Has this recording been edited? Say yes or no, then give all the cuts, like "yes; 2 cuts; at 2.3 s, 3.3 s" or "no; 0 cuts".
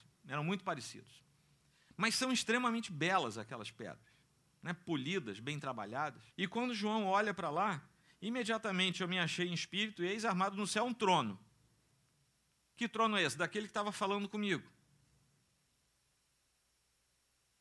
yes; 1 cut; at 6.3 s